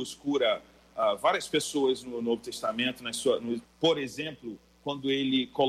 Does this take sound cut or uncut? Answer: cut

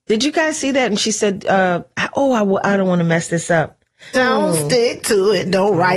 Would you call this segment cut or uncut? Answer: cut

